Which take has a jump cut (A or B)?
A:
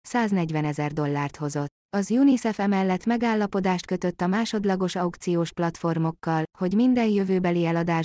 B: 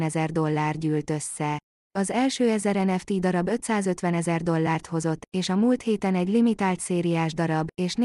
A